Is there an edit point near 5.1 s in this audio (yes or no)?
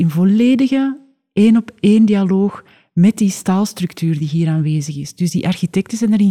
no